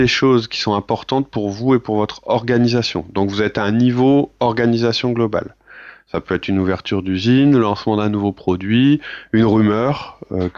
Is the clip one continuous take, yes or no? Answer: yes